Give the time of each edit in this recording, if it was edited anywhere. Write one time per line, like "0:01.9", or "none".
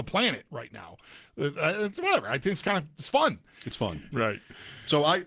0:04.1